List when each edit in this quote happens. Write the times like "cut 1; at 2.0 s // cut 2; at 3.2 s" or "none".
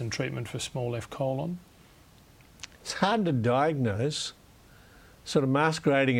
none